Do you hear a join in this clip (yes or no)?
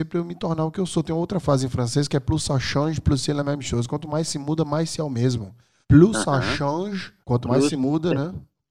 yes